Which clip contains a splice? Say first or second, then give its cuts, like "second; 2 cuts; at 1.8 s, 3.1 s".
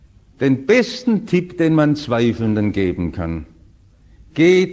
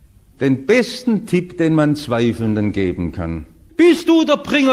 second; 1 cut; at 3.7 s